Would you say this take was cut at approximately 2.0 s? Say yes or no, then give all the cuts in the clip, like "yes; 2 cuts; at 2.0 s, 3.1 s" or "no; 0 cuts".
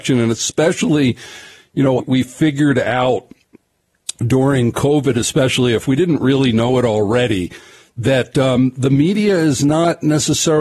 yes; 1 cut; at 2.0 s